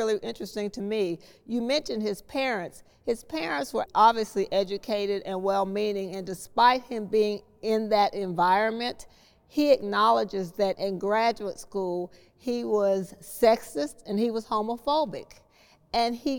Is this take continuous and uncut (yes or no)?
no